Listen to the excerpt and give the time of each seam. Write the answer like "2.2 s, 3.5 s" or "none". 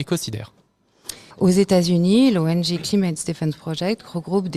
1.3 s